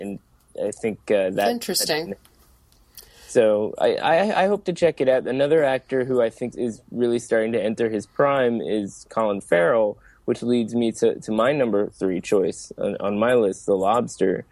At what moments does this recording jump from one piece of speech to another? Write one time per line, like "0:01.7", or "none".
0:06.5